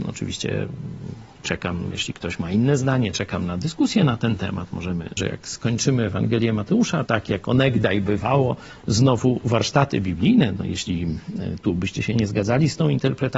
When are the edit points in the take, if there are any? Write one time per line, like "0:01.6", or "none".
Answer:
0:05.2
0:07.1